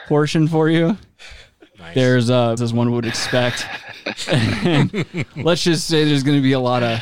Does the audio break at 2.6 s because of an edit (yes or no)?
yes